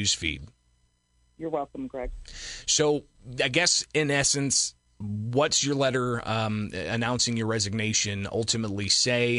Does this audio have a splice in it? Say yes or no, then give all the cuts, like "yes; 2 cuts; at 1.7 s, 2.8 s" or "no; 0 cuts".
no; 0 cuts